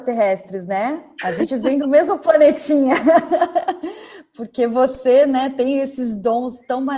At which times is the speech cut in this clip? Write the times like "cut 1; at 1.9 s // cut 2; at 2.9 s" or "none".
none